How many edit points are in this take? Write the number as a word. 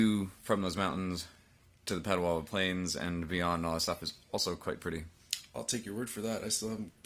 zero